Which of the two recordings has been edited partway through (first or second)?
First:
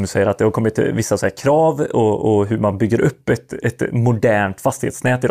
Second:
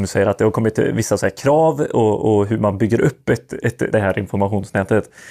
second